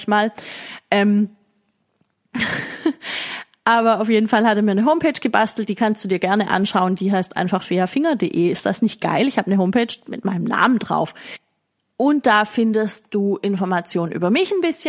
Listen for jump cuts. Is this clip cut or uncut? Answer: uncut